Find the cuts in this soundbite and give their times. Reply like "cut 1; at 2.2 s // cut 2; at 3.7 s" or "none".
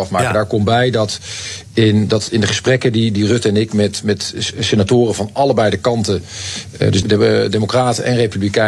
cut 1; at 7.0 s